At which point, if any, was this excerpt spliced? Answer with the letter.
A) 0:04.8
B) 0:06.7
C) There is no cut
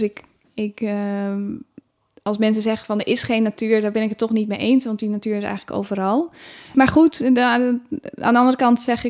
B